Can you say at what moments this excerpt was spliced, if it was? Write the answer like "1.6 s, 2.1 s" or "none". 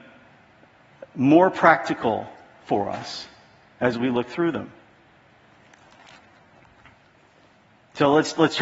none